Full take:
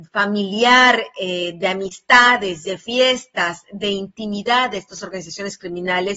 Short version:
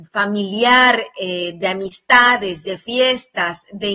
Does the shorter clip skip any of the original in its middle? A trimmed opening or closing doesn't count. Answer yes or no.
no